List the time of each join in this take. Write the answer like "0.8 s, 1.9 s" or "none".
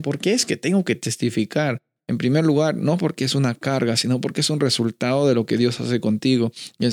2.0 s